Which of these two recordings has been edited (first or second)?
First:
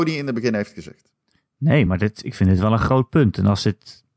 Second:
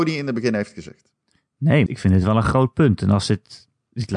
second